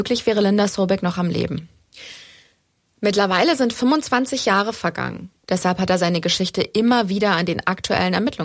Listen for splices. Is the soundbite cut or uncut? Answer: cut